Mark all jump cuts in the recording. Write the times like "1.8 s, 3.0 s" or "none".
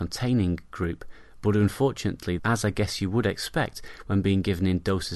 2.4 s